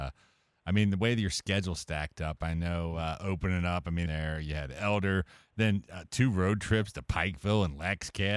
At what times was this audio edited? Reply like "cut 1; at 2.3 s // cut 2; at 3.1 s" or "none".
cut 1; at 4.1 s